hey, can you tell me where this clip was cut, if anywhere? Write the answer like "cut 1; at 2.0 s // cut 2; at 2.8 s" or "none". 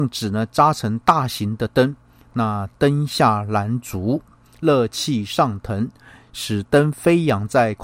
none